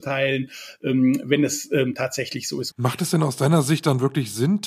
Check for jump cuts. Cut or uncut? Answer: cut